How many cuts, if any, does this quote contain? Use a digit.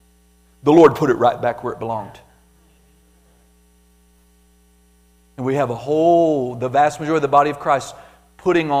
0